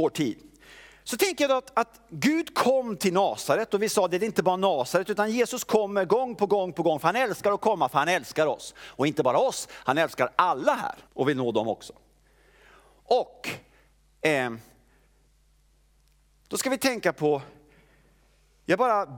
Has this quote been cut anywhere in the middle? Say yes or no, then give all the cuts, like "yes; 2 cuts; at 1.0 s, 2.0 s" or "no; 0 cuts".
yes; 1 cut; at 11.1 s